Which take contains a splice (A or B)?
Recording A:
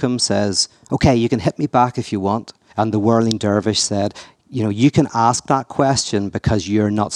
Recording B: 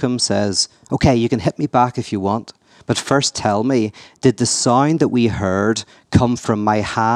A